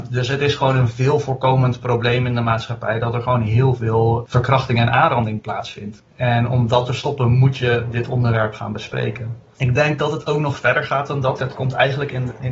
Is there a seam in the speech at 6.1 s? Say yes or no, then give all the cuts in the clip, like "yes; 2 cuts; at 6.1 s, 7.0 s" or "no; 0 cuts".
no; 2 cuts; at 9.6 s, 11.4 s